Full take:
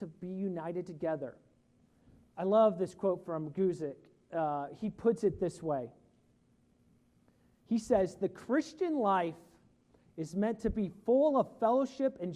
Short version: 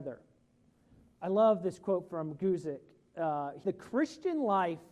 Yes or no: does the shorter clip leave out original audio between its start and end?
yes